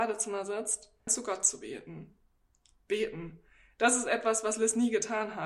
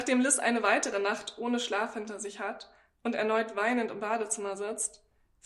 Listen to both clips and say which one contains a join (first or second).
first